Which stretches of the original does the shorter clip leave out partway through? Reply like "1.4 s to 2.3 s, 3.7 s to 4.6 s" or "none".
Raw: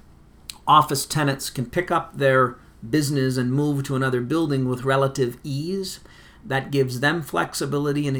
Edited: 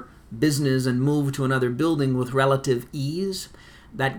none